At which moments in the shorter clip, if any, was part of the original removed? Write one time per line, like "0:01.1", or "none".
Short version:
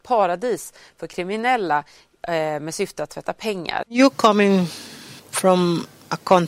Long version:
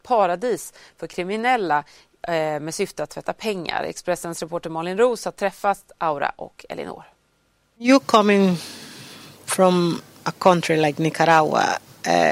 0:03.8
0:05.2